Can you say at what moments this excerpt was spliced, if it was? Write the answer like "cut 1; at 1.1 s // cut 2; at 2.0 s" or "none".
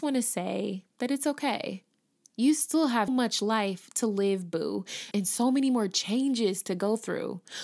cut 1; at 3.1 s // cut 2; at 5.1 s